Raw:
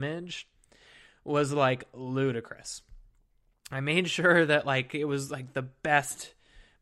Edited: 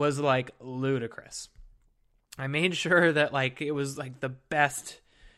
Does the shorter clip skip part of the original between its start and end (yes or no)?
no